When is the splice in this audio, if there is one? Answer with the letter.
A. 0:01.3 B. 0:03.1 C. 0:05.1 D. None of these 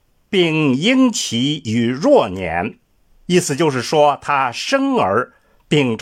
B